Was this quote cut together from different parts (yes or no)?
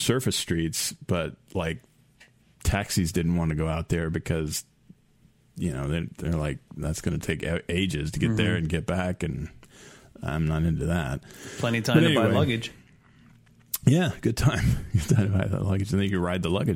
no